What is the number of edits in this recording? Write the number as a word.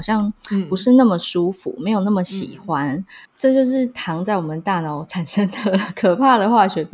one